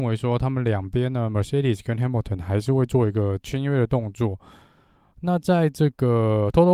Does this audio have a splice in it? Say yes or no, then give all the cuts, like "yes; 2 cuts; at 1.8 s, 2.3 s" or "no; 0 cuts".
no; 0 cuts